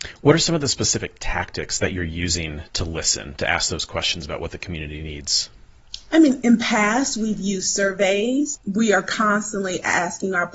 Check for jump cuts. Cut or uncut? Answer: uncut